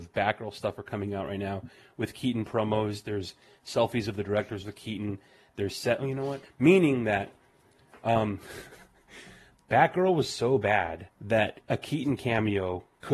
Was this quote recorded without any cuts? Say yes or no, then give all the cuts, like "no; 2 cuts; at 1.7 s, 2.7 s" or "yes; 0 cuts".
no; 2 cuts; at 6.4 s, 11.1 s